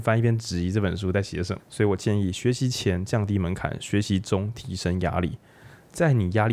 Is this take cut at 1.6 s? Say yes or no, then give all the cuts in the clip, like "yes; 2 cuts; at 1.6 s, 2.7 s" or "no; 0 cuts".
yes; 1 cut; at 1.6 s